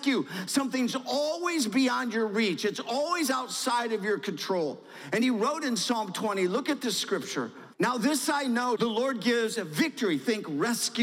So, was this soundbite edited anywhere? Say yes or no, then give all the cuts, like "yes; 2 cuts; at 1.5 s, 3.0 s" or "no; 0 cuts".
yes; 2 cuts; at 7.7 s, 8.8 s